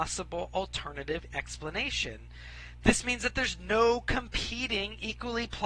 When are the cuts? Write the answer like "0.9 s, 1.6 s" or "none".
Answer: none